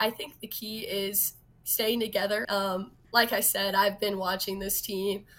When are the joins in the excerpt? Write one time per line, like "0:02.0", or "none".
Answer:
0:02.4